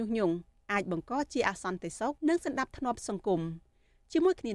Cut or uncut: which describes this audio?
cut